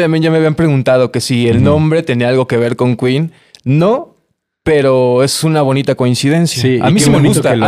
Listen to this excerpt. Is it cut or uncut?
uncut